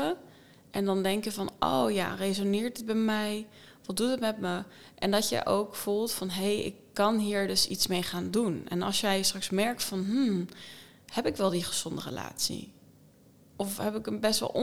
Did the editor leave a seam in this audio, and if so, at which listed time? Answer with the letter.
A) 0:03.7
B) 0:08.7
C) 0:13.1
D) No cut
D